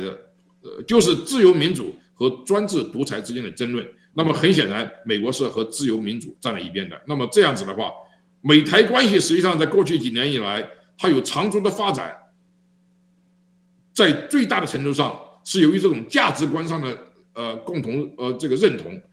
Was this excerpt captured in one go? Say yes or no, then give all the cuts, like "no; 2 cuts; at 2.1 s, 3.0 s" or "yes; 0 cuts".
yes; 0 cuts